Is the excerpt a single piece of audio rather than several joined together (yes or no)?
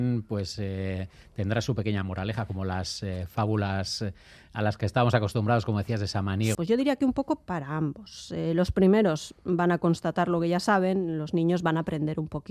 no